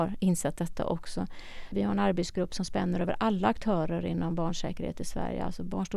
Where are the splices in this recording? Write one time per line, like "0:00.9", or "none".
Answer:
0:01.7

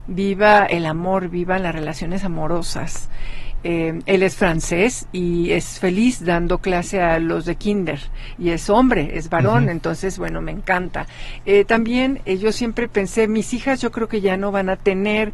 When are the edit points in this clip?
0:03.6

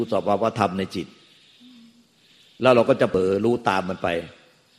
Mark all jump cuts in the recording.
none

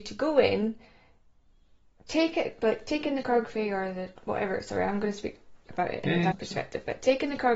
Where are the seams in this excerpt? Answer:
0:06.3

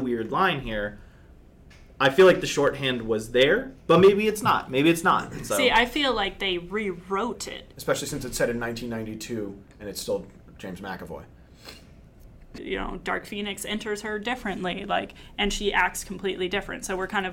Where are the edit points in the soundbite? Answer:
0:07.7
0:12.6

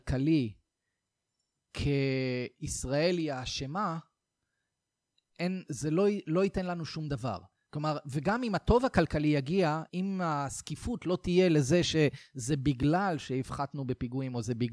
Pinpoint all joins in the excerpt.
0:05.6
0:09.9

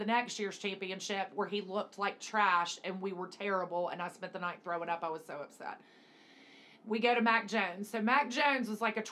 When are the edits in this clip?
none

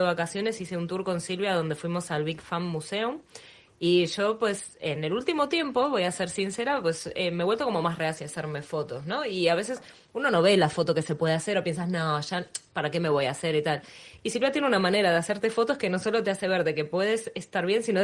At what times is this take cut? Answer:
none

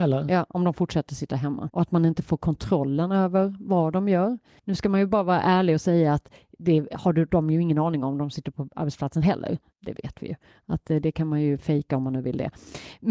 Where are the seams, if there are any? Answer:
0:01.7
0:04.6
0:09.7

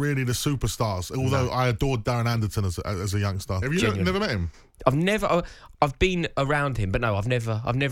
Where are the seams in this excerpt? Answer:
0:03.6
0:05.7

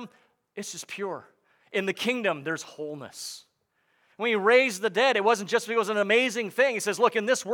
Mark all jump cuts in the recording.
none

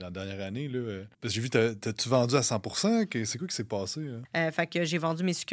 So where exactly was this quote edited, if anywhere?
0:01.1
0:04.2

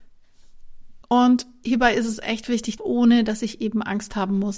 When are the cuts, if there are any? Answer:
0:01.0
0:02.8

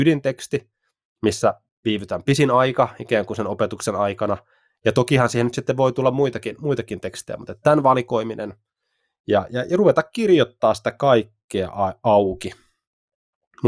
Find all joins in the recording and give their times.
none

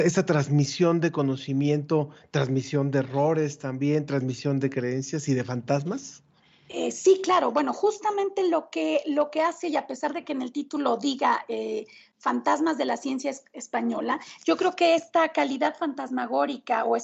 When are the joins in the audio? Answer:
none

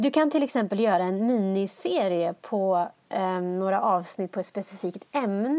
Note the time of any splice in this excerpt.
none

